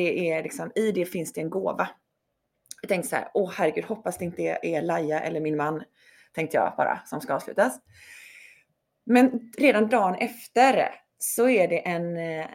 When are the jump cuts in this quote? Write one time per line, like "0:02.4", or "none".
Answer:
none

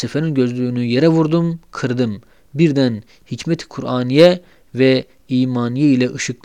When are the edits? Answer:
none

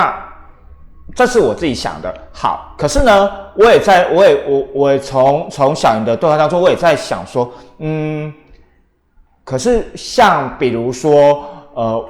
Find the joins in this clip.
none

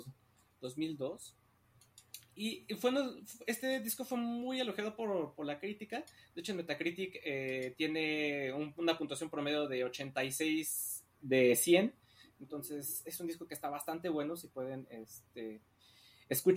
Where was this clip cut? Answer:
none

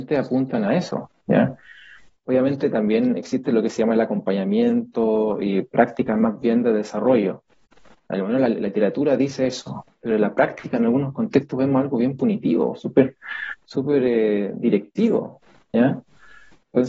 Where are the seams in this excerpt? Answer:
none

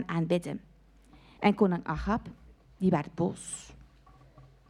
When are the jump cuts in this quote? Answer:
0:01.4

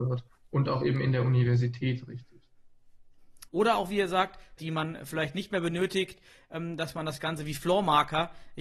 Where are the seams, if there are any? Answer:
0:03.5
0:04.6

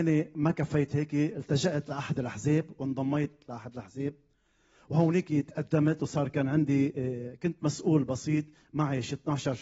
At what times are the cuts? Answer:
none

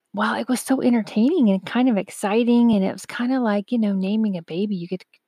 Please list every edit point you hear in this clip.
none

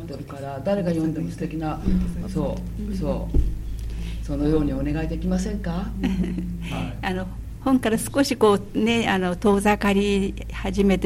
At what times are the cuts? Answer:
0:02.2

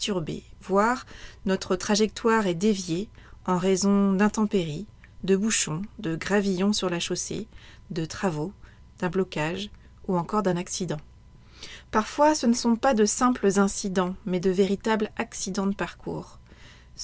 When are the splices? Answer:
0:08.8

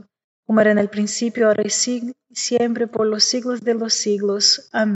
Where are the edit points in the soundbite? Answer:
none

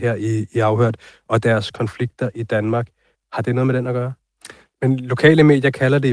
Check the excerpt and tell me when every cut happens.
0:03.1
0:04.7

